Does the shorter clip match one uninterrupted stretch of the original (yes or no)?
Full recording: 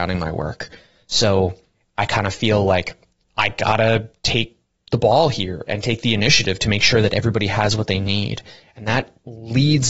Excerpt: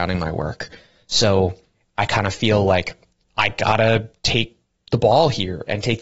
yes